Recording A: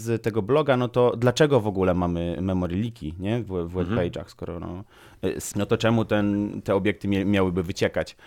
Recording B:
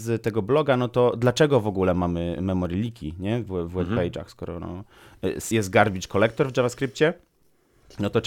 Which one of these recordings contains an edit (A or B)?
A